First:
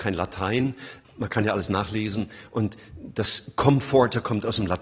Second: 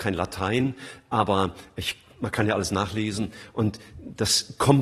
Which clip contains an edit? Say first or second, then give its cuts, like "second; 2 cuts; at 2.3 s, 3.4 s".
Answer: first; 1 cut; at 1.0 s